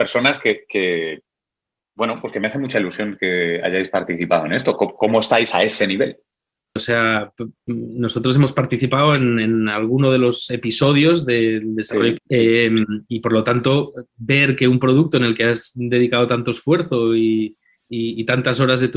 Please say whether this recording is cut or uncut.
cut